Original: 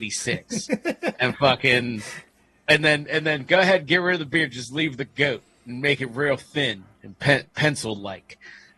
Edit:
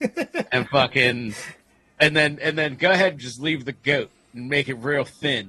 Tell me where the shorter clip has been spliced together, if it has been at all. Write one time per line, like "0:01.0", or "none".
0:03.2